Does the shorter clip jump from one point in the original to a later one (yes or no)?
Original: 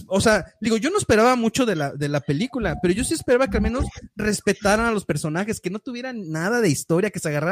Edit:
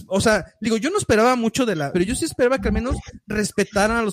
yes